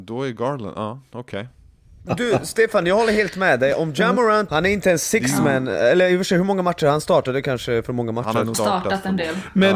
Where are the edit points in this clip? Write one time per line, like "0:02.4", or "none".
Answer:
0:02.1
0:04.5
0:08.5